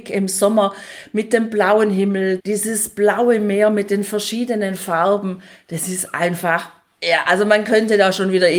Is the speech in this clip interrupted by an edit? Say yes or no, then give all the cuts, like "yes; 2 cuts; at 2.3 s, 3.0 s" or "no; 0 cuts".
yes; 1 cut; at 2.4 s